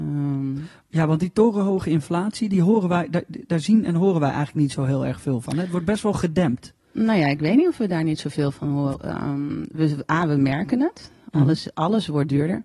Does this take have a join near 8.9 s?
yes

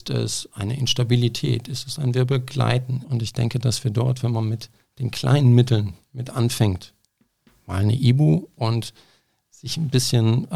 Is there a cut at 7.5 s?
no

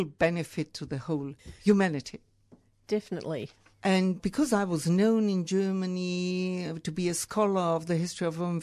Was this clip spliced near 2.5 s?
no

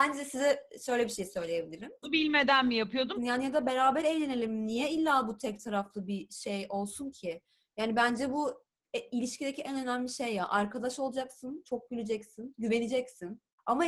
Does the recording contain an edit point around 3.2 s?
yes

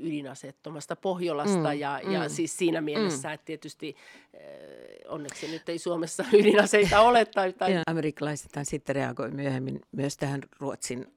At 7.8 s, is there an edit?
yes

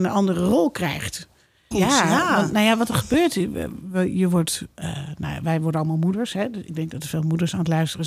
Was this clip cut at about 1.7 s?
yes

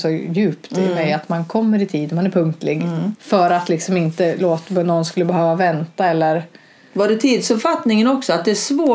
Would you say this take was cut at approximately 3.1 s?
yes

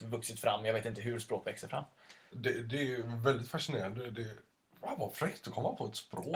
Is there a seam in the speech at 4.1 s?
no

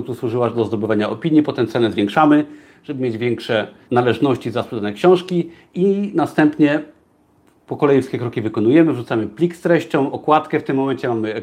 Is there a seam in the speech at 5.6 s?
yes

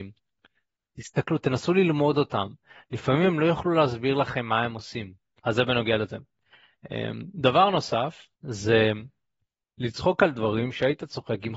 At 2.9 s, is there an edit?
no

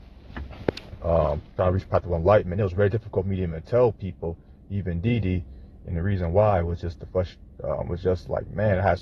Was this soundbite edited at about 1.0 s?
no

